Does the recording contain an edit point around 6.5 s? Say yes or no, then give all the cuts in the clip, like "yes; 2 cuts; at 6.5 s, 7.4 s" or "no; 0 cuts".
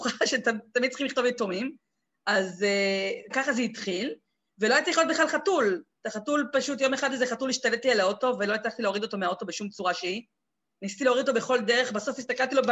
no; 1 cut; at 3.3 s